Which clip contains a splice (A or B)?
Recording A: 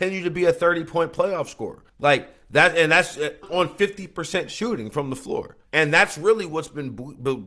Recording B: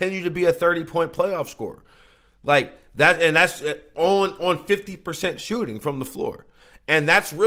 A